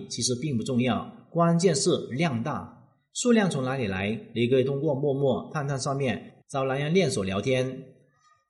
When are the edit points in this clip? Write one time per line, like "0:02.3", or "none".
0:06.4